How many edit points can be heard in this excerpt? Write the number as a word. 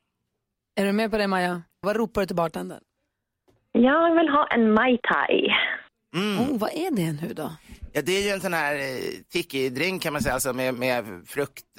one